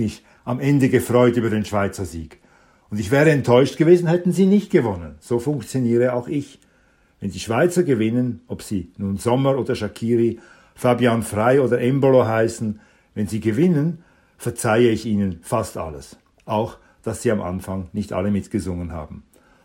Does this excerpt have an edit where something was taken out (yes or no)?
no